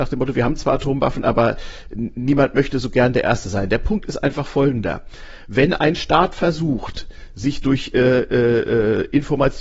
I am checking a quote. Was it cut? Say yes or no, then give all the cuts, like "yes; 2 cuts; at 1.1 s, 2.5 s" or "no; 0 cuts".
no; 0 cuts